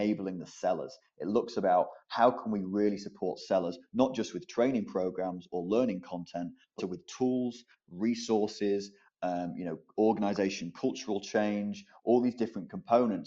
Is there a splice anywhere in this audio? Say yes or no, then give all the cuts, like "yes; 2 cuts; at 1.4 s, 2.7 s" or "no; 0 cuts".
yes; 1 cut; at 6.8 s